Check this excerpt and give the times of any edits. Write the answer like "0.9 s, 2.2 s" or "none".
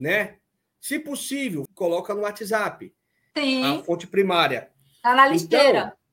1.7 s, 3.3 s